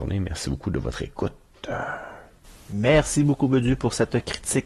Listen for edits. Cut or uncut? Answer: uncut